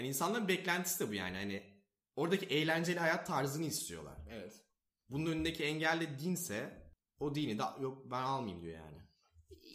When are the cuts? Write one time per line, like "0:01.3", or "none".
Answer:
none